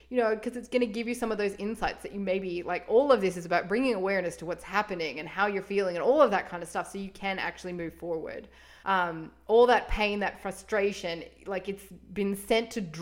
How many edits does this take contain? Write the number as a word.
one